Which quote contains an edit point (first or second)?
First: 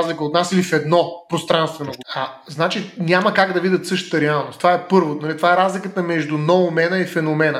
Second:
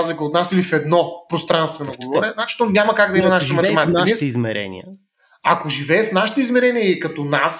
first